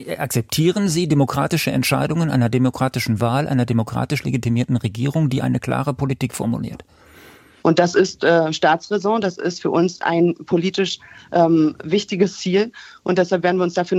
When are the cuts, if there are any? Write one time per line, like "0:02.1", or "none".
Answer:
0:07.6